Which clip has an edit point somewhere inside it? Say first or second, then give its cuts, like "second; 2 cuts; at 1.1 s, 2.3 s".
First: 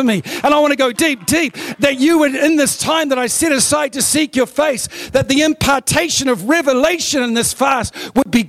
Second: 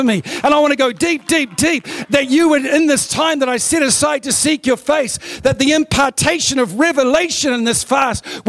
first; 1 cut; at 0.9 s